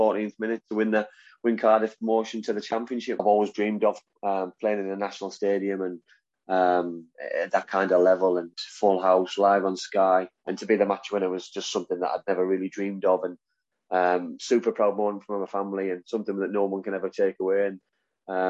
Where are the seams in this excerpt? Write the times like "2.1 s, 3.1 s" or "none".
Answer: 3.2 s, 8.5 s, 10.4 s